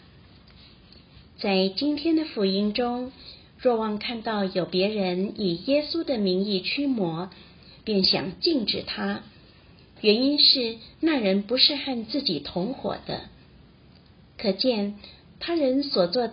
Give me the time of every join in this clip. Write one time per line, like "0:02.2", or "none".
none

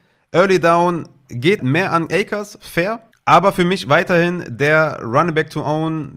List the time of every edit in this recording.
0:01.6

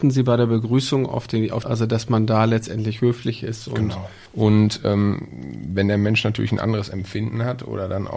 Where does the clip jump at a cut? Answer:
0:01.6
0:04.3

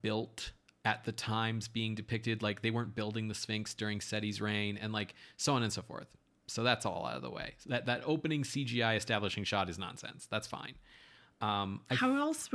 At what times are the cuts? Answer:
none

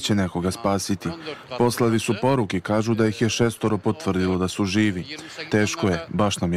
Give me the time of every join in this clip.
0:05.5

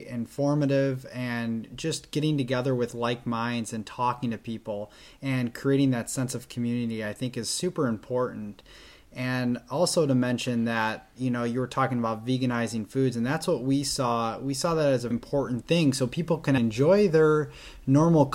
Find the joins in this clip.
0:15.1
0:16.6

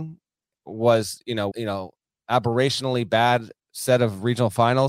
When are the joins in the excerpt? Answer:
0:01.5

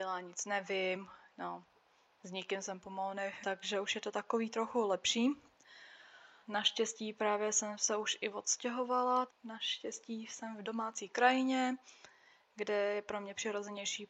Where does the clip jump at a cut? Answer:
0:03.4
0:06.4
0:09.3

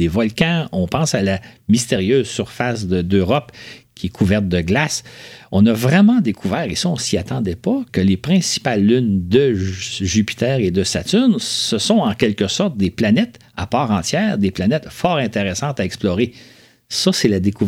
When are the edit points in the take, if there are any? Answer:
0:07.9

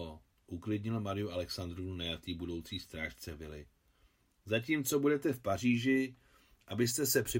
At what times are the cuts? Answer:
none

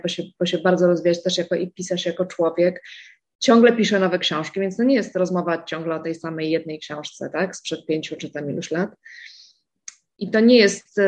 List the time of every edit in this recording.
0:10.1

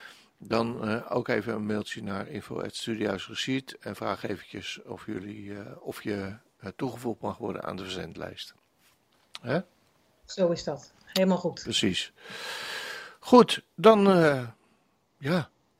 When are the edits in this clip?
none

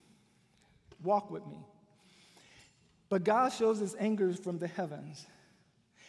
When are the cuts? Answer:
none

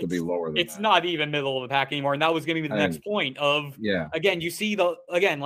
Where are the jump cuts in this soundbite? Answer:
none

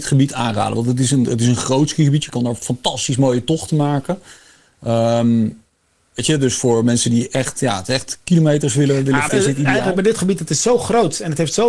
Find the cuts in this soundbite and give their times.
0:09.3

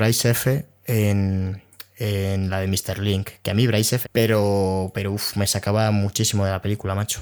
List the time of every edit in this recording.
0:04.0

